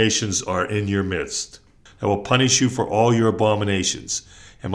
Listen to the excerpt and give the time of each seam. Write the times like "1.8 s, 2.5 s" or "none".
1.9 s

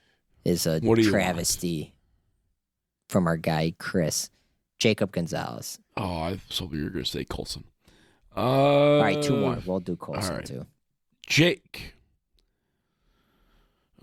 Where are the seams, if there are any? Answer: none

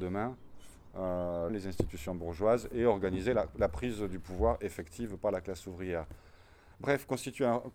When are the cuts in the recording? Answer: 1.5 s, 6.7 s

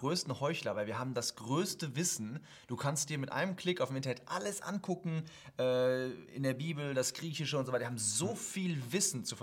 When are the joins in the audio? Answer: none

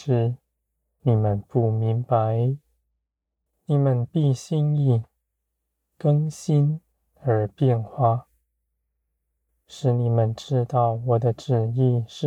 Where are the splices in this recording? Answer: 1.0 s, 3.5 s

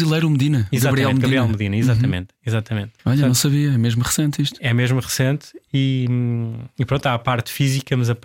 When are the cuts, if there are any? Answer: 3.0 s

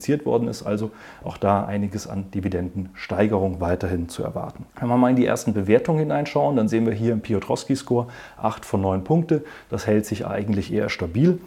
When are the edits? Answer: 4.7 s, 9.7 s

